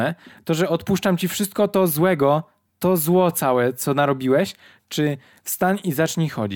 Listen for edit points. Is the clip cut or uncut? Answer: uncut